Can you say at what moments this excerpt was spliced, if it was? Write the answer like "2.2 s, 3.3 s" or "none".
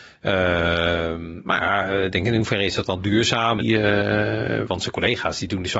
3.6 s